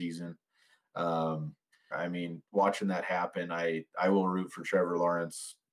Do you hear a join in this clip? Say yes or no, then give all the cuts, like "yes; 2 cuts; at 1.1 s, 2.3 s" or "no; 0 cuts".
yes; 1 cut; at 1.9 s